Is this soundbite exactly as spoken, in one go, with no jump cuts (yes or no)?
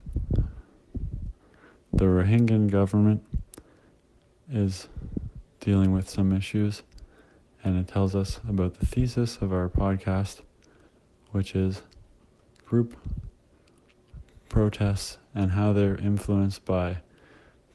yes